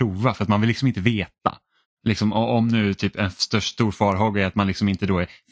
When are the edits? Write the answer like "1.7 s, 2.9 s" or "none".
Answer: none